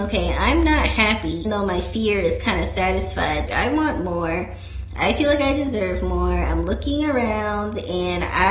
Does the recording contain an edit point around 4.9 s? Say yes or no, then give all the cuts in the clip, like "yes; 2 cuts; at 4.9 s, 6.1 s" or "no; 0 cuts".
no; 2 cuts; at 1.4 s, 3.5 s